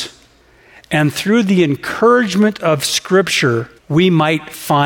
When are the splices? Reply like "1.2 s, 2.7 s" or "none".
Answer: 3.8 s